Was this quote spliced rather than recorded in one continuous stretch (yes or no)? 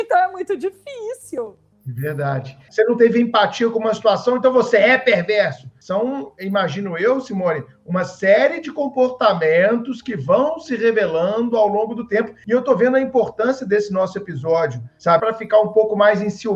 yes